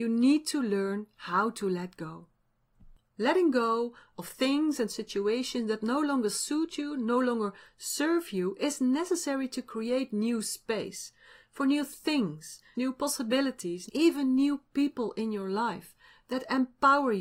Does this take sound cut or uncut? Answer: cut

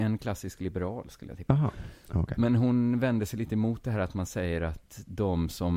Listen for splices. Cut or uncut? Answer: uncut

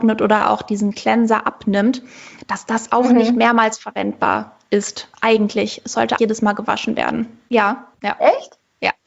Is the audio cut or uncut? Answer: cut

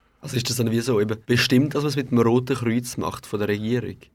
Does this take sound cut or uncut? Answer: cut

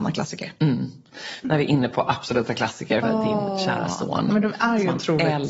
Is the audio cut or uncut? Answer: cut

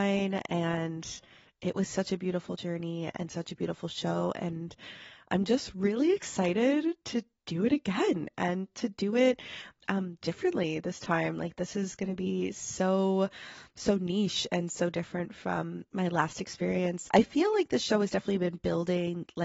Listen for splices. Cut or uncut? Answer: cut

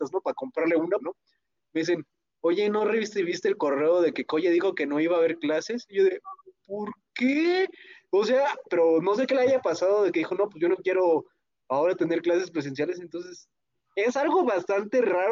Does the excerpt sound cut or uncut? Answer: cut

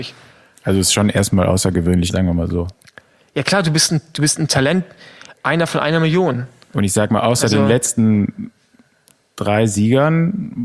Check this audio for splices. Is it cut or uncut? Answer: cut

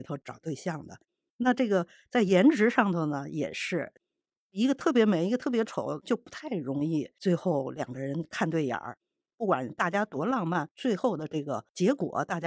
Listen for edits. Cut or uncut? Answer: cut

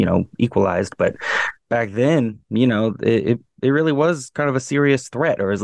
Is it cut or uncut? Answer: uncut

